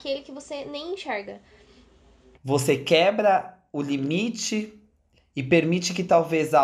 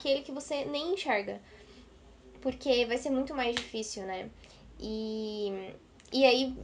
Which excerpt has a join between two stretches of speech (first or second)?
first